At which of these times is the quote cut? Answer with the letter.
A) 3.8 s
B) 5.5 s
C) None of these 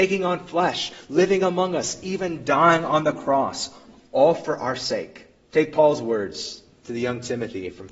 B